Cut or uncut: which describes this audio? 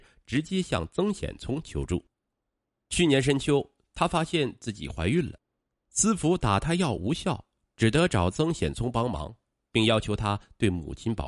uncut